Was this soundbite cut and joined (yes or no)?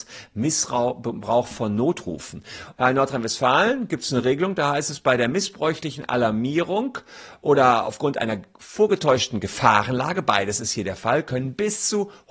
yes